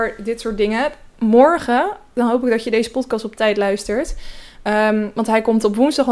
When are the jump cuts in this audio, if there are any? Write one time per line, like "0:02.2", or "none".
none